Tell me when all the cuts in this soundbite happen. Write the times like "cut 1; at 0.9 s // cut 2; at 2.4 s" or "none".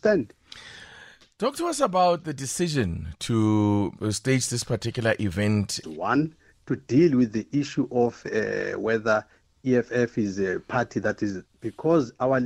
cut 1; at 5.8 s

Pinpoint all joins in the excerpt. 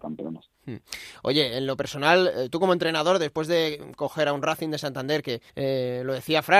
cut 1; at 5.5 s

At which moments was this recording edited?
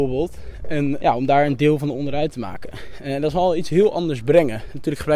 cut 1; at 1.0 s

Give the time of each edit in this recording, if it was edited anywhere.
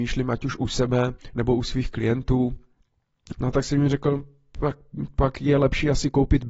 cut 1; at 3.3 s

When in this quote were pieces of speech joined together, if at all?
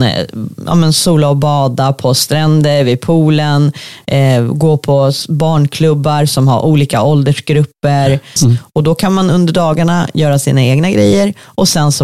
cut 1; at 8.4 s

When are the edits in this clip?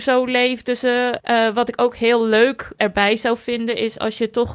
cut 1; at 1.2 s // cut 2; at 2.8 s

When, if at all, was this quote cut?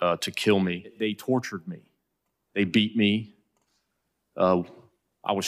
none

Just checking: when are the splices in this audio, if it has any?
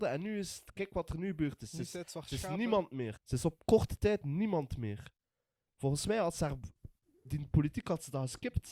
cut 1; at 3.1 s

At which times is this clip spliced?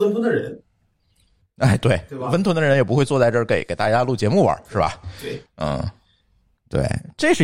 none

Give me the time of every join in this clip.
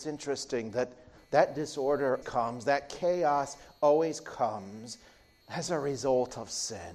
cut 1; at 2.2 s

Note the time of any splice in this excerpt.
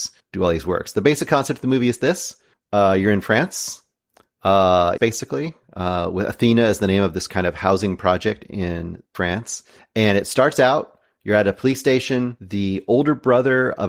cut 1; at 5.0 s

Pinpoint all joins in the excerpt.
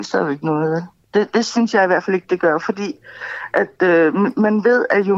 cut 1; at 1.0 s

